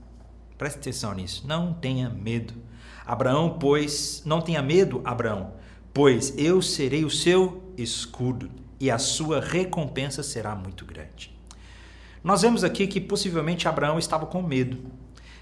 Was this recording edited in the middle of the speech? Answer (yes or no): no